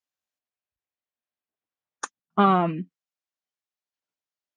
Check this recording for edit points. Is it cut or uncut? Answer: cut